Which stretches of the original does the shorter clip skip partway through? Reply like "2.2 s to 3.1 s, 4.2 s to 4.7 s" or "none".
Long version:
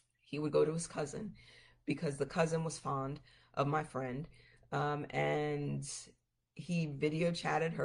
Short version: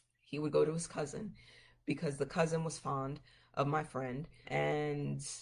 4.4 s to 5.1 s